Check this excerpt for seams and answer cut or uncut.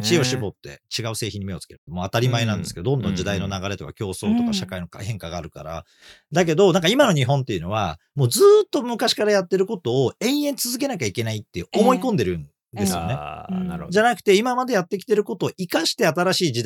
cut